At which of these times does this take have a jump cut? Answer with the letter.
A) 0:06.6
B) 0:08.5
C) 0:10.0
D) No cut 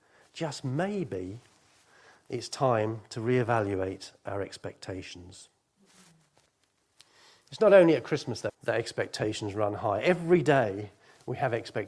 B